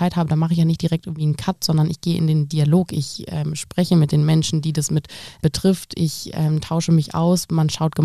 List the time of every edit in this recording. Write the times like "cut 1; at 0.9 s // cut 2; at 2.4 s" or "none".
none